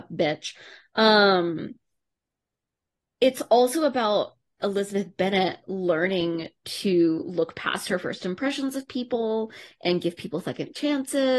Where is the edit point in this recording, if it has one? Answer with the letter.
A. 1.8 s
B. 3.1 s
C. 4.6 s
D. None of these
C